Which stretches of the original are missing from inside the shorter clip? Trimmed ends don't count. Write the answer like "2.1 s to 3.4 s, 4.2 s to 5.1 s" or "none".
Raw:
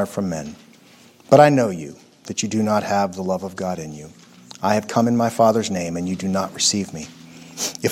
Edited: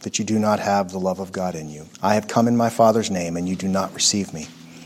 4.2 s to 4.5 s